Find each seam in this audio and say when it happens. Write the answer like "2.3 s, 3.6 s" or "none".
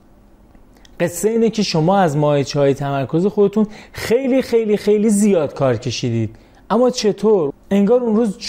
7.5 s